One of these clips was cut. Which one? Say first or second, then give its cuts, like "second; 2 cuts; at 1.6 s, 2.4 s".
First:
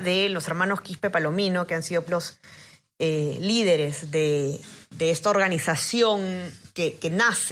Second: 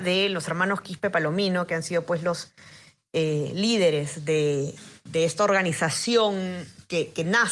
first; 1 cut; at 2.1 s